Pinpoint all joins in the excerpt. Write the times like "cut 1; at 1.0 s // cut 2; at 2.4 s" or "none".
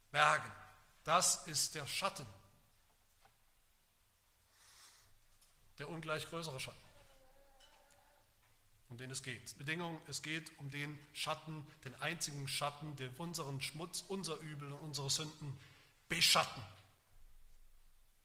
cut 1; at 9.5 s // cut 2; at 13.2 s